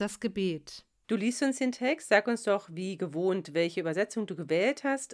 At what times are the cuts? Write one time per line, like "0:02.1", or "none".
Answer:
0:01.0